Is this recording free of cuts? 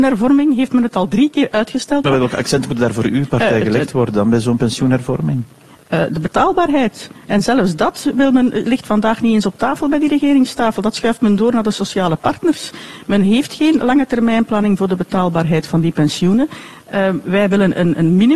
no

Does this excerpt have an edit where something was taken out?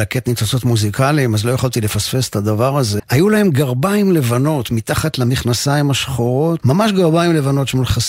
yes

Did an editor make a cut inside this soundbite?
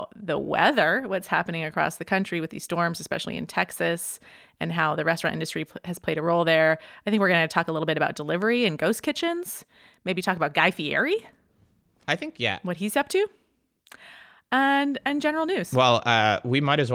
no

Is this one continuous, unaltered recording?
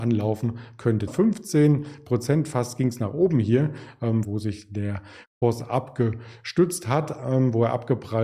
no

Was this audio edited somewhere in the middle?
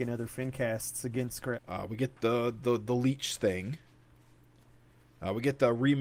yes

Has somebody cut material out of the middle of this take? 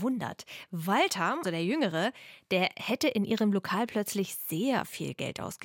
yes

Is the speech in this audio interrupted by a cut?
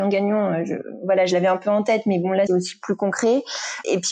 yes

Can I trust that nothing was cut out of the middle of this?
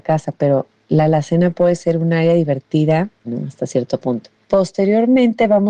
no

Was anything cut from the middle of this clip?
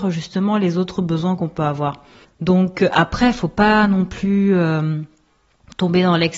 no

